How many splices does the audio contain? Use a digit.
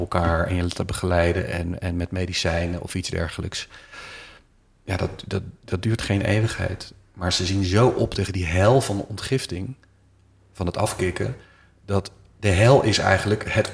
0